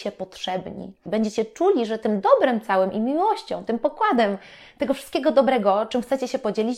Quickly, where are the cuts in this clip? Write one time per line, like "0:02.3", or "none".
0:01.1